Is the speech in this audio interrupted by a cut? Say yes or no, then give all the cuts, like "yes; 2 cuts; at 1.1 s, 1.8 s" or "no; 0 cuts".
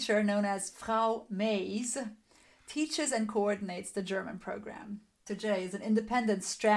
yes; 1 cut; at 5.3 s